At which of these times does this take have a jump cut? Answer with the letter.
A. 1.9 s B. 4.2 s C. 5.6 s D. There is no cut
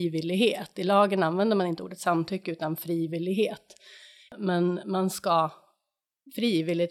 D